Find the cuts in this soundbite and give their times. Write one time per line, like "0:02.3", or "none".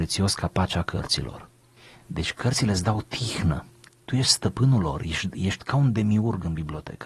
0:03.9